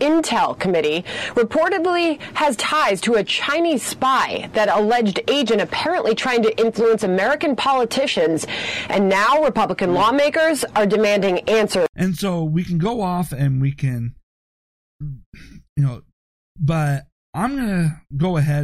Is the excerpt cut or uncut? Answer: cut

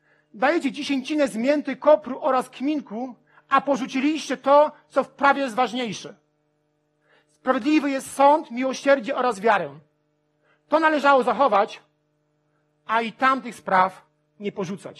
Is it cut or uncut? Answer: uncut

